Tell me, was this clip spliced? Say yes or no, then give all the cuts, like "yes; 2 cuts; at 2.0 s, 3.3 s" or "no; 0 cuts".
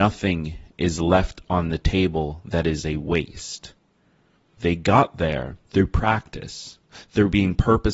yes; 2 cuts; at 4.6 s, 5.7 s